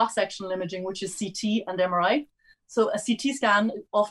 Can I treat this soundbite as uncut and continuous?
yes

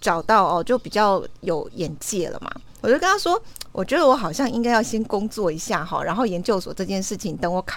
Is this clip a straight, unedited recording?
no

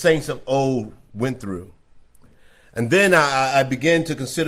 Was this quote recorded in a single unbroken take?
yes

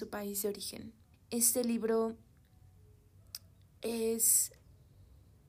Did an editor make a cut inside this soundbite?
yes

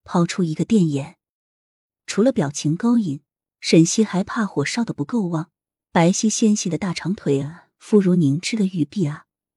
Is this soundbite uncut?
yes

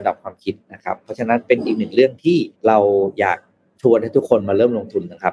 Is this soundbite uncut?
no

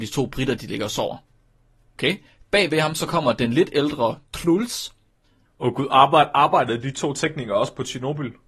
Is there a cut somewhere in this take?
yes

